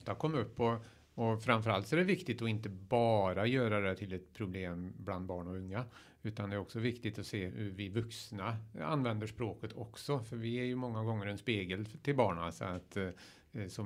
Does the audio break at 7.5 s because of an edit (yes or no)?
yes